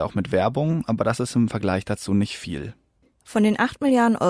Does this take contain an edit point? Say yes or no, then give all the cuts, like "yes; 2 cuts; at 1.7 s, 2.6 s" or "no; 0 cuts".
no; 0 cuts